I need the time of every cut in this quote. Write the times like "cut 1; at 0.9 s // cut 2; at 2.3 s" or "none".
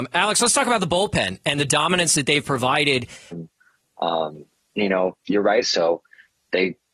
cut 1; at 3.3 s // cut 2; at 5.6 s

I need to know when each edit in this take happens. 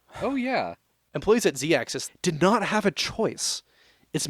cut 1; at 2.1 s

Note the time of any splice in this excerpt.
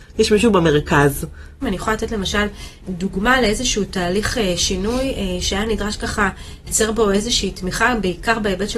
cut 1; at 1.6 s

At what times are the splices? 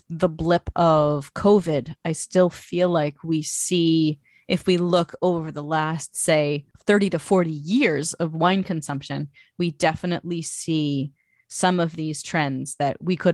none

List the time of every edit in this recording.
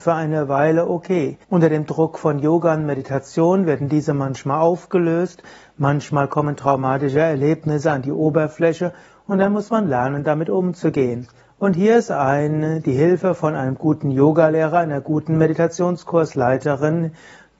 cut 1; at 1.4 s

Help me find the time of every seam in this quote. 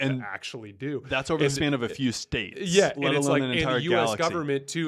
cut 1; at 2.9 s

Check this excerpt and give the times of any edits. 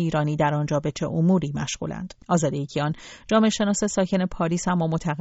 cut 1; at 2.2 s

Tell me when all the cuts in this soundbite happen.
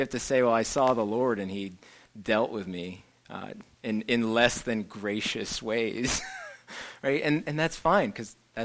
none

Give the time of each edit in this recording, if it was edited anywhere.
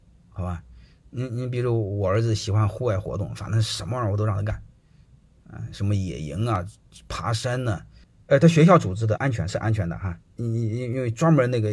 cut 1; at 9.2 s

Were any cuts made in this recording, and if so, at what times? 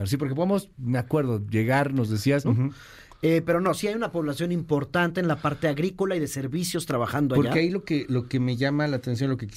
cut 1; at 2.4 s

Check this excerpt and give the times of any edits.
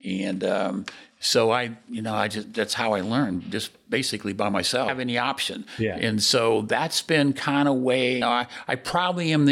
cut 1; at 4.9 s // cut 2; at 8.2 s

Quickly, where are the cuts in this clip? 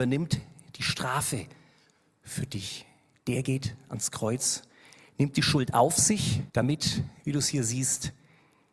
cut 1; at 3.2 s // cut 2; at 6.5 s

